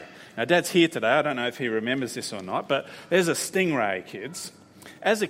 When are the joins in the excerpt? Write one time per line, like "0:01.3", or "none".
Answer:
none